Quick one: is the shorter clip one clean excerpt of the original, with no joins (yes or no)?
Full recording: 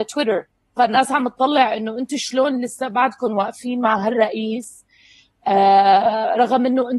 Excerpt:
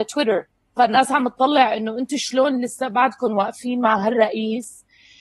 yes